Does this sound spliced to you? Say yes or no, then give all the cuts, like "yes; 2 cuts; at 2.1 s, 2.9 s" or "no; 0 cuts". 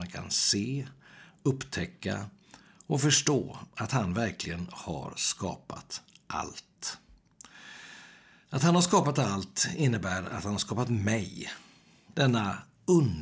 yes; 1 cut; at 12.1 s